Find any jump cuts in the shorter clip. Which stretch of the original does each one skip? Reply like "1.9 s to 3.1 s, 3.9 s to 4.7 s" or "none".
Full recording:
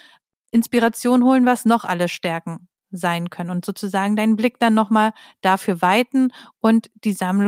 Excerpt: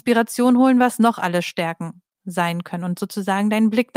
none